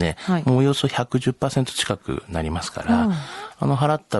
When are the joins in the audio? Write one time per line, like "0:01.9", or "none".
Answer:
none